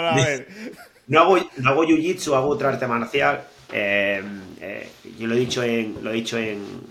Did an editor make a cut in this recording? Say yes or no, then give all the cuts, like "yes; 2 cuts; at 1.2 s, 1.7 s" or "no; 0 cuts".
no; 0 cuts